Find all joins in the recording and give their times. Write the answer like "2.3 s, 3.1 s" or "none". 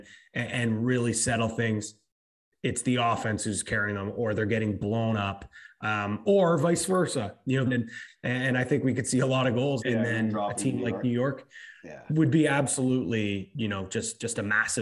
7.7 s, 9.8 s